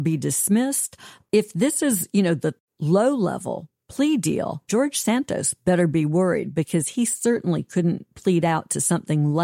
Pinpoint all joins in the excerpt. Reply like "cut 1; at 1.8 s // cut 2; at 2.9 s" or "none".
cut 1; at 4.7 s